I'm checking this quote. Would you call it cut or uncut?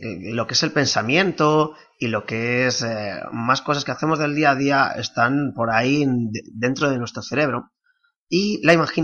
uncut